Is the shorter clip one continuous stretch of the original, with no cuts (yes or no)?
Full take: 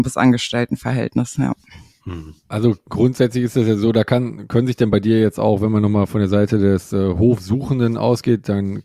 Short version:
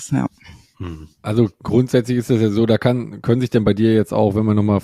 yes